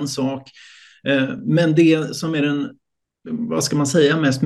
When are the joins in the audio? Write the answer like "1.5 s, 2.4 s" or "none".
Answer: none